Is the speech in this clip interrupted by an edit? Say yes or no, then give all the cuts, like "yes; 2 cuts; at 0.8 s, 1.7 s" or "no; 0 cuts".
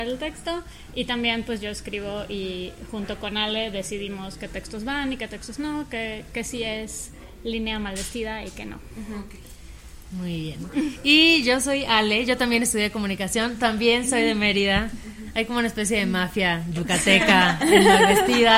no; 0 cuts